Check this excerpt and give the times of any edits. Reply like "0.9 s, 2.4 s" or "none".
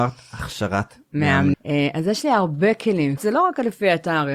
1.5 s, 3.2 s